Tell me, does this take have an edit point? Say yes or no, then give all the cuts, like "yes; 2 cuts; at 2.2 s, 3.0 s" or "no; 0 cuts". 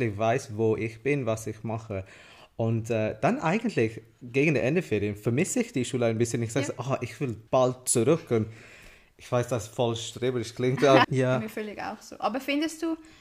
yes; 2 cuts; at 7.5 s, 11.0 s